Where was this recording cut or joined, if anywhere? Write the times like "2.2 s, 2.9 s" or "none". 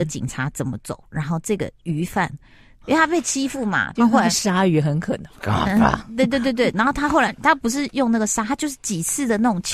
2.8 s, 4.0 s